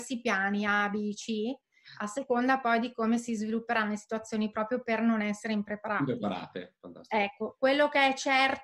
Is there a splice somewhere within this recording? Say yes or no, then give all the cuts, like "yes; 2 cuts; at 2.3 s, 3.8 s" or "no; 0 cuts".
no; 0 cuts